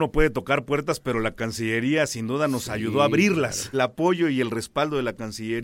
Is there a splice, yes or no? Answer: yes